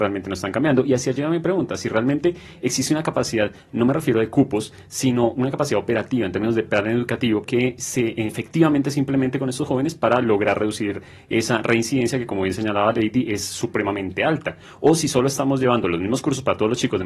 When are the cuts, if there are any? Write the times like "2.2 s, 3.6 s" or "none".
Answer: 7.4 s